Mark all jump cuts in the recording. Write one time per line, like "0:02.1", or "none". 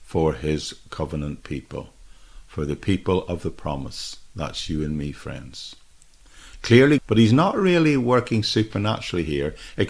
0:07.0